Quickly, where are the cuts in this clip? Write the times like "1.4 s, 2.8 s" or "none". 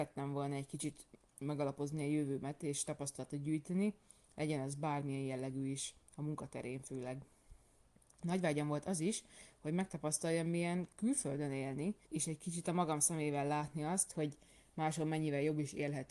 12.0 s, 14.1 s